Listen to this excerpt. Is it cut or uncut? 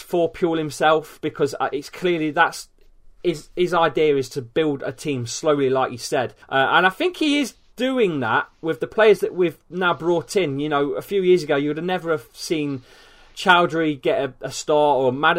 cut